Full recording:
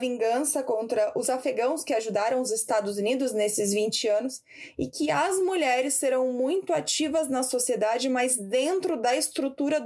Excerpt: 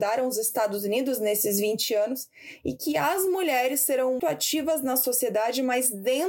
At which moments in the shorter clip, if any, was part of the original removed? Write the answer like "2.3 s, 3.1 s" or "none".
4.2 s